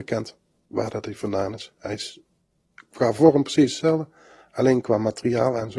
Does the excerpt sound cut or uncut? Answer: uncut